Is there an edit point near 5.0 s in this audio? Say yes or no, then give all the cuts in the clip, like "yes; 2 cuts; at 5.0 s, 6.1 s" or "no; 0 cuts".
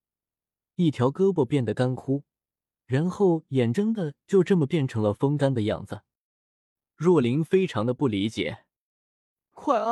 no; 2 cuts; at 3.7 s, 6.9 s